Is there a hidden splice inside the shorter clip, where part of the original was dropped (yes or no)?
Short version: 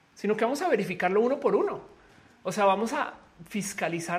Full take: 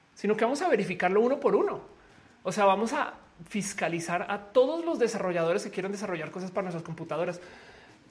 no